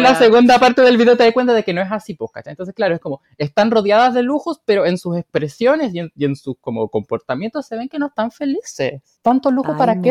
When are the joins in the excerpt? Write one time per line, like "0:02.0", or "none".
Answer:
none